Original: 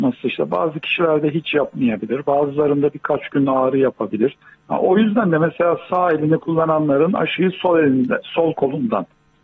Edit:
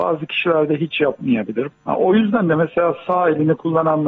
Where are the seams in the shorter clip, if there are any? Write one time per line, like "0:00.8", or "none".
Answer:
0:01.7